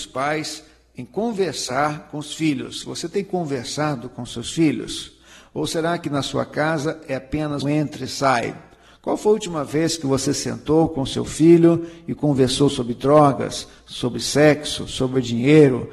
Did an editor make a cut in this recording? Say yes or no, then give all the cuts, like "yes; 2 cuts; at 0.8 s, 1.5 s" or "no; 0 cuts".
yes; 1 cut; at 7.6 s